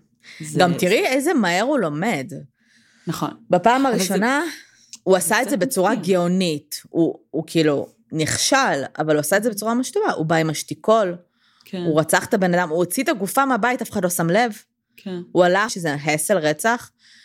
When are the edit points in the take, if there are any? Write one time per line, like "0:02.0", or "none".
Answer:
0:15.7